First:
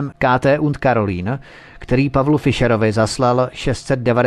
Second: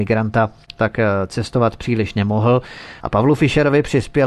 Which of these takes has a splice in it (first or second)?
second